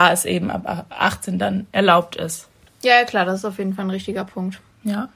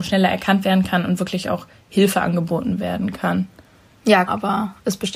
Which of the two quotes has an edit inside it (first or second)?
second